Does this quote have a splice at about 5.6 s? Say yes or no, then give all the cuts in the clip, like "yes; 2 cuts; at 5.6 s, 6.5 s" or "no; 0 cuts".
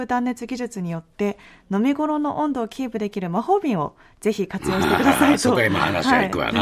no; 0 cuts